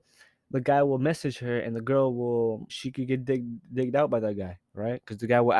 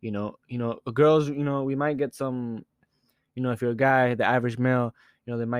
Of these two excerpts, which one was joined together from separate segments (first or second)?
first